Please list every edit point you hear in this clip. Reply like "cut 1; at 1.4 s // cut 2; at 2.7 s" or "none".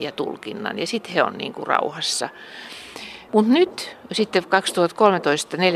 cut 1; at 3.3 s